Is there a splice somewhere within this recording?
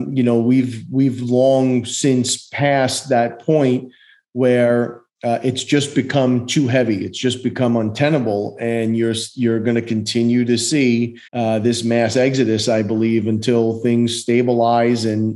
yes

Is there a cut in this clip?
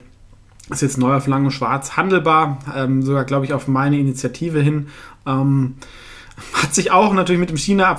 no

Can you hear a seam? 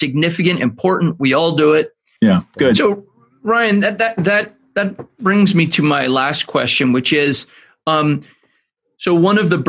yes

